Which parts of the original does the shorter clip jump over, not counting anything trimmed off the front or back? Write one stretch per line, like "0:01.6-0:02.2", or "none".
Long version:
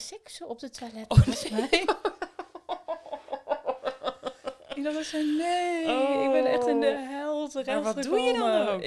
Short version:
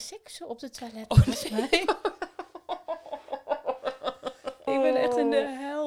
0:04.7-0:06.2